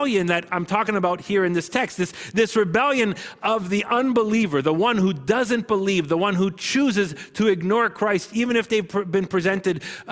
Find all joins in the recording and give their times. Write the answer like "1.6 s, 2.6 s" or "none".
none